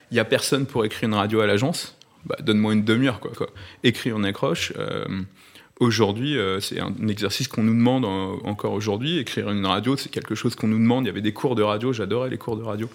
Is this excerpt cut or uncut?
cut